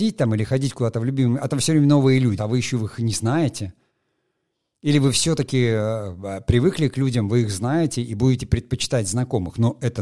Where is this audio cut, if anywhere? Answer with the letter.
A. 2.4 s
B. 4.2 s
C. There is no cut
A